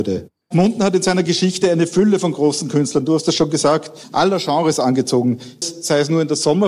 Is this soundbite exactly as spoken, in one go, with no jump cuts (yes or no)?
no